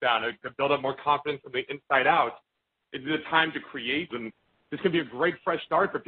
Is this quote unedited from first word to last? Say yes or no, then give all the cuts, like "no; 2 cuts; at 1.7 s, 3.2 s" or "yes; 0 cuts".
no; 2 cuts; at 2.8 s, 4.1 s